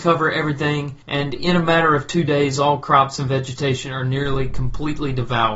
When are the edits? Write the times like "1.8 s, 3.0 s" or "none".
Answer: 1.0 s